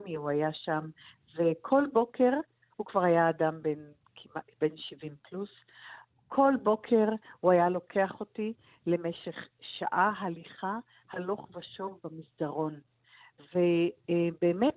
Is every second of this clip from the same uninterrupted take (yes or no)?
yes